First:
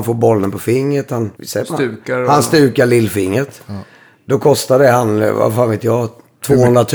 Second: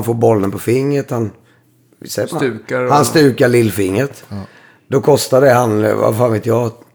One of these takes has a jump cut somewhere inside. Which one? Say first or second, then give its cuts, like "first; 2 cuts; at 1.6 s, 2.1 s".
first; 1 cut; at 1.4 s